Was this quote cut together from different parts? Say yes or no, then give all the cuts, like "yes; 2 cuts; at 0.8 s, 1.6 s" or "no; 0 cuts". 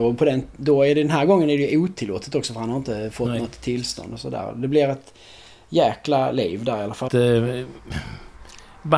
yes; 1 cut; at 7.1 s